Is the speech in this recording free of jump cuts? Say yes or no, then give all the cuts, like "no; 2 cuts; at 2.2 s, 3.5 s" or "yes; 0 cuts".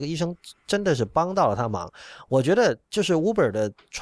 yes; 0 cuts